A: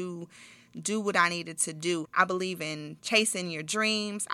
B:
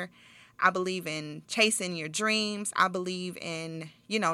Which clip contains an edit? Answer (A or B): A